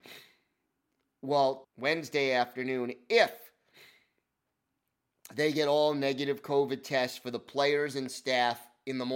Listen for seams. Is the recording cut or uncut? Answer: cut